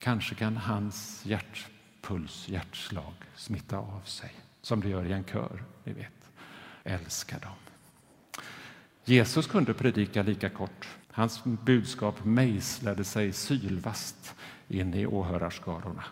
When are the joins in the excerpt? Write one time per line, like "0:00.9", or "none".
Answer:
0:06.8
0:11.0